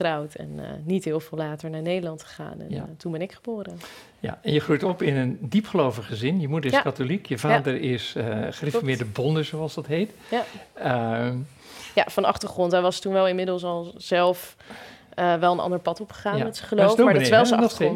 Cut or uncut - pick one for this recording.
uncut